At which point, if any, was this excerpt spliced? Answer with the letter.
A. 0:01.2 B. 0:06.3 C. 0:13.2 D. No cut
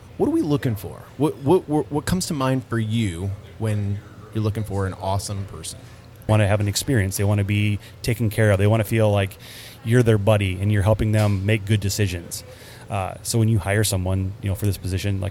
B